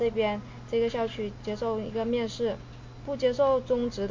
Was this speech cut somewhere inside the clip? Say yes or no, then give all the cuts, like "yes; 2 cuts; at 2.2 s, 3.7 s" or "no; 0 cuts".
yes; 1 cut; at 3.0 s